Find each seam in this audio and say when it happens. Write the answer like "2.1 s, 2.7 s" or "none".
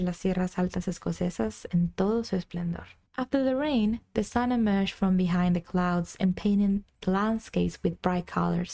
3.0 s

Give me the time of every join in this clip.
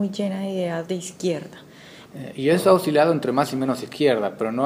2.1 s

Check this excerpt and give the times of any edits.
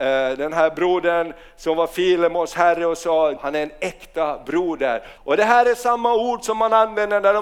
3.4 s, 5.2 s

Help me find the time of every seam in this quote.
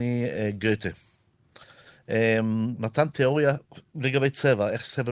2.8 s

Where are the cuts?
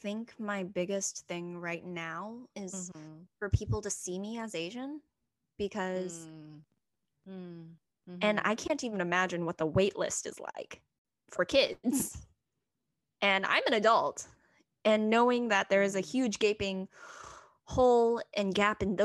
2.5 s, 7.1 s

